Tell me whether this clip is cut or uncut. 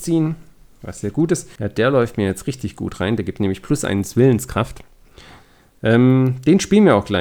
cut